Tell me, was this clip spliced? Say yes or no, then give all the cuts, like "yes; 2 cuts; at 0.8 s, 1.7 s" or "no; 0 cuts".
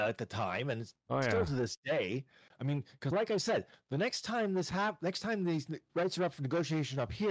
no; 0 cuts